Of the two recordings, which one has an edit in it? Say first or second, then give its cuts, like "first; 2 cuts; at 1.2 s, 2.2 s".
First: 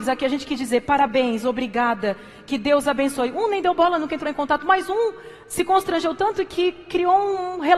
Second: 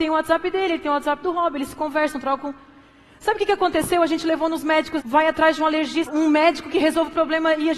second; 2 cuts; at 5.0 s, 6.1 s